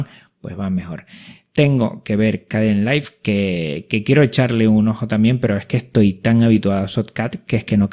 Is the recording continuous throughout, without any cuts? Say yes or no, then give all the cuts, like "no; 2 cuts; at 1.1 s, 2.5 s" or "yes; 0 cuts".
yes; 0 cuts